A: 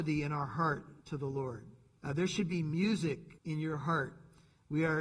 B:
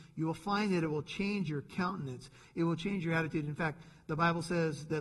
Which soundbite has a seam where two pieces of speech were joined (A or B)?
A